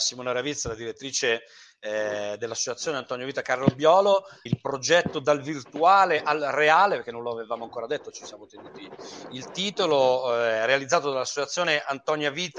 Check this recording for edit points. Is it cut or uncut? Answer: cut